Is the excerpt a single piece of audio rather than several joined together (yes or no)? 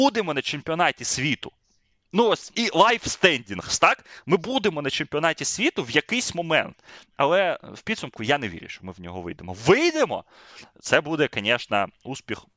no